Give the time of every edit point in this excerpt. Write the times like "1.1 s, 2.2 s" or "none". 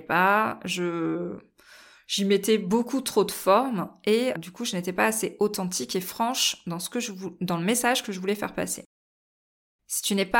4.3 s